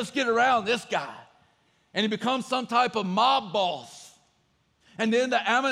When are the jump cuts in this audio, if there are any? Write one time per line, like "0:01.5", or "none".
0:04.8